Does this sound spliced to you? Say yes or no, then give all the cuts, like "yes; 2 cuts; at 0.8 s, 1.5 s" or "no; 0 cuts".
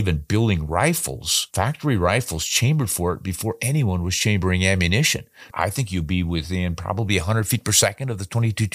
yes; 2 cuts; at 1.5 s, 5.5 s